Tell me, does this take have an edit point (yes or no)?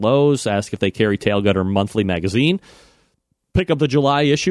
no